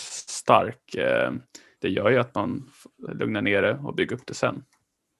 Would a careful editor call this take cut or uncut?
cut